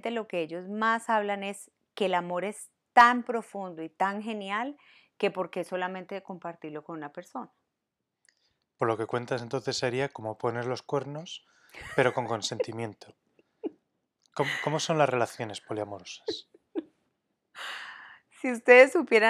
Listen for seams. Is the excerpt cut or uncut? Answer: uncut